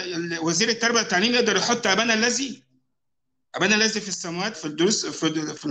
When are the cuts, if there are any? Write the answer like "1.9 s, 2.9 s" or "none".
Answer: 4.5 s